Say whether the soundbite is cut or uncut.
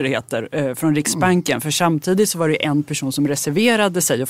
uncut